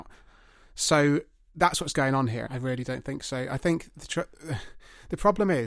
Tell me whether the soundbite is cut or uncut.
cut